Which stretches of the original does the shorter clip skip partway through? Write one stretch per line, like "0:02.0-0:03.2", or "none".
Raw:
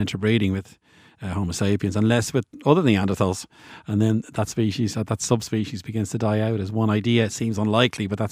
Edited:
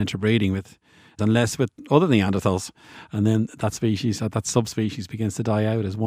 0:01.2-0:01.9